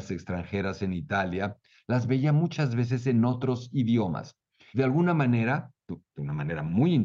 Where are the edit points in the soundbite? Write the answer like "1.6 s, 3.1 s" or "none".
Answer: 4.7 s